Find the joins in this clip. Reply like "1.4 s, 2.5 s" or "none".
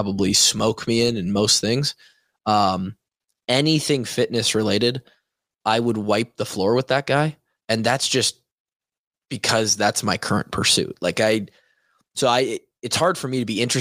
none